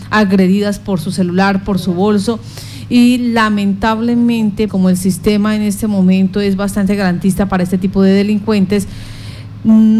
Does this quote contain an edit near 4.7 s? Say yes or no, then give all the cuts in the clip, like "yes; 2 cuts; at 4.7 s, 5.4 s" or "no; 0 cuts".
yes; 1 cut; at 4.7 s